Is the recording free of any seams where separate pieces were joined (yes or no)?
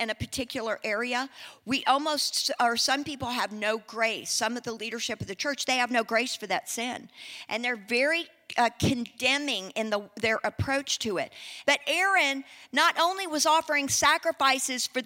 no